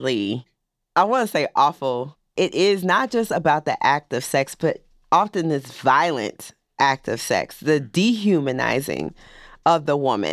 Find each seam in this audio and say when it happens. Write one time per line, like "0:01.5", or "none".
none